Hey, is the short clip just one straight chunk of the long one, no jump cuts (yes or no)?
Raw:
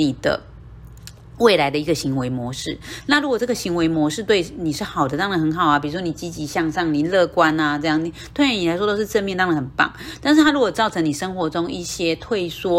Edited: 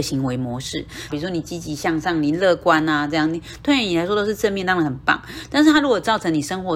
no